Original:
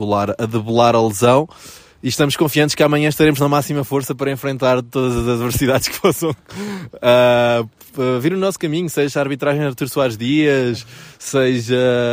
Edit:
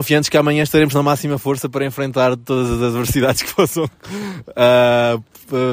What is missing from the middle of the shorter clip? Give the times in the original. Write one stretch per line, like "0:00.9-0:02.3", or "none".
none